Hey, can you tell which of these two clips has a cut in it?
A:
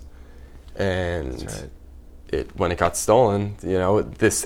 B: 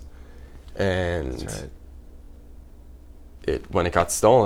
A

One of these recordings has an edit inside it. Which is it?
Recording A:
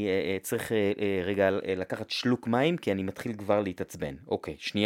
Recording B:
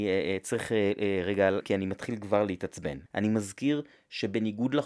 B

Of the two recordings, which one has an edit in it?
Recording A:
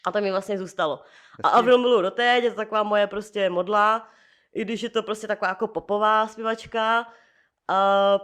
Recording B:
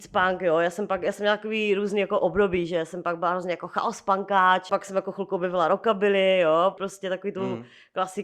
B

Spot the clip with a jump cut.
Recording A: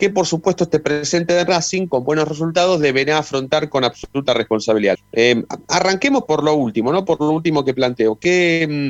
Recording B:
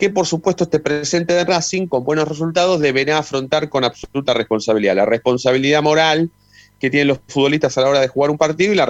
A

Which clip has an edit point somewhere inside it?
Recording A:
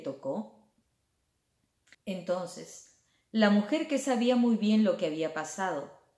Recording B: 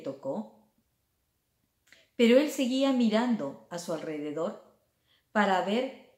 A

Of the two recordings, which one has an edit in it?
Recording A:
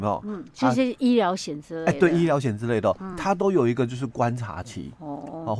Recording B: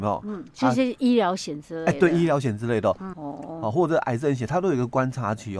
B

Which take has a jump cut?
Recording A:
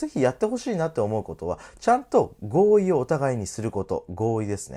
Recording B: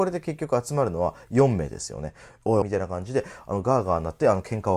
B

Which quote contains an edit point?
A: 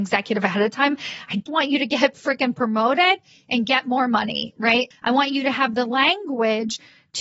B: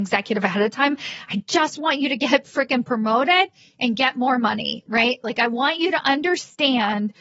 A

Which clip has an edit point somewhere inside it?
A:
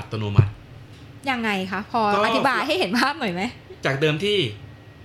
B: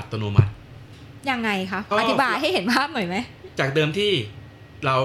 B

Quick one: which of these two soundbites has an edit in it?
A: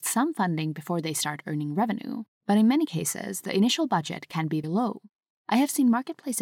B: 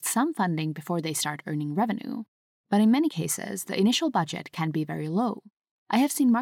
A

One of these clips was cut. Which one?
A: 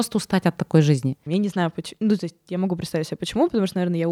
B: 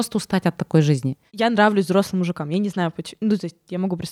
A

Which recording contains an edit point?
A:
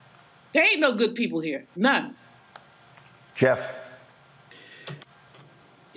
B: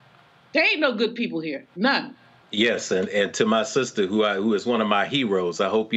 B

